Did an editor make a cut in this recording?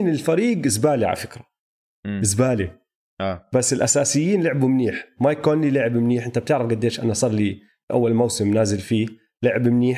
no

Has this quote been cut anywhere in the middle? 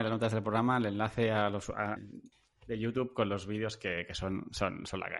yes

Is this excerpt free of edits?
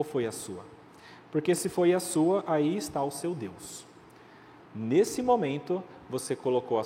yes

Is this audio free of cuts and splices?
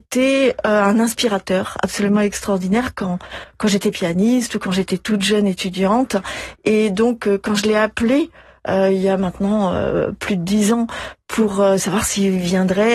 yes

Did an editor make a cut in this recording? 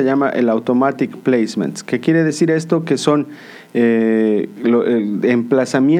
no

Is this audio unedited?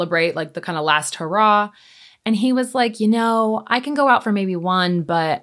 yes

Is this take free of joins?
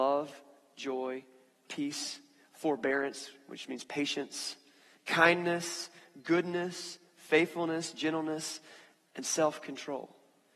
yes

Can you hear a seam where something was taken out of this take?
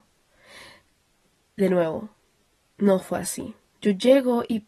yes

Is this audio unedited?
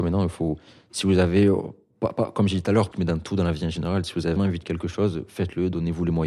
no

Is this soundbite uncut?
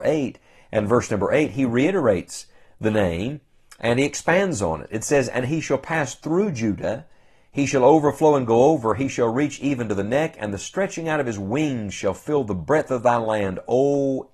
yes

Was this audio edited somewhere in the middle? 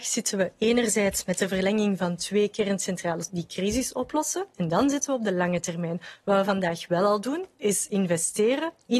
yes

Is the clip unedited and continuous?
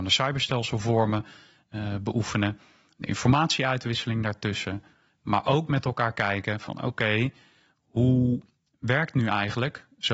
yes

